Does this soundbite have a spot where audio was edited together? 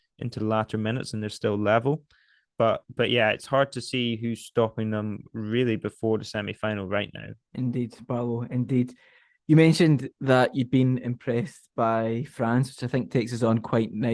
yes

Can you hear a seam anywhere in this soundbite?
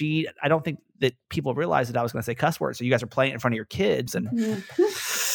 yes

